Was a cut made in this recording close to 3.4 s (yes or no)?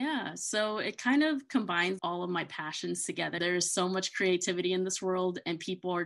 yes